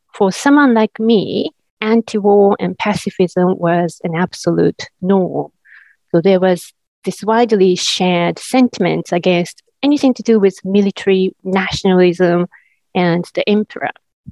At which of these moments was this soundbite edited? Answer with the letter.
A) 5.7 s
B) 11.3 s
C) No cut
B